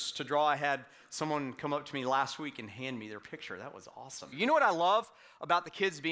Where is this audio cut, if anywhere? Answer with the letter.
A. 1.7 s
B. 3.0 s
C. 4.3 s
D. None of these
C